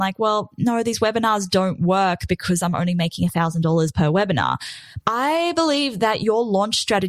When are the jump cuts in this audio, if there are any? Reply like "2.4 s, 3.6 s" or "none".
5.0 s